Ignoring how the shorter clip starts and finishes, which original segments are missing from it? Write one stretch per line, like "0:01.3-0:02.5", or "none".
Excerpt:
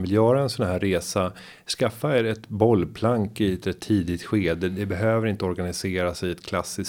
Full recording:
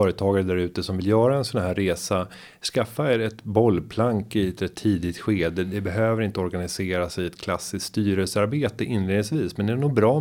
none